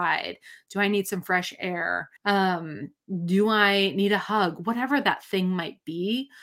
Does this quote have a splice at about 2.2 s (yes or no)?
yes